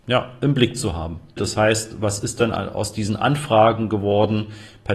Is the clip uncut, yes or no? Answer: no